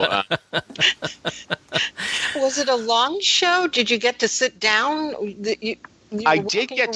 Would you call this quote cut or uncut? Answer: uncut